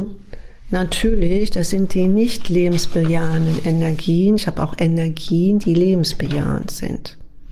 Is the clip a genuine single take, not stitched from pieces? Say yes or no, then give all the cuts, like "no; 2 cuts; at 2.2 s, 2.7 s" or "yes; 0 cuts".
yes; 0 cuts